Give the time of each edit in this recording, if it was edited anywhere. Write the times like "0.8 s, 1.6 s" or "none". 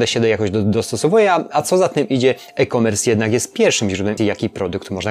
4.2 s